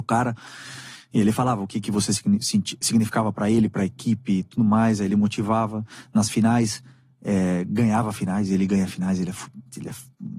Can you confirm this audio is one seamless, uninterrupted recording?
yes; 0 cuts

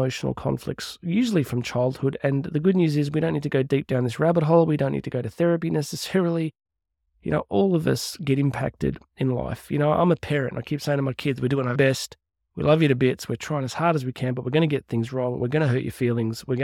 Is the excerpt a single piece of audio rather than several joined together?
no; 1 cut; at 11.7 s

